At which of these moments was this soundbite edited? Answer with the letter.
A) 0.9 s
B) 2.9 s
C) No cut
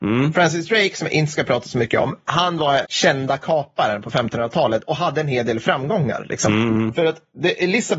B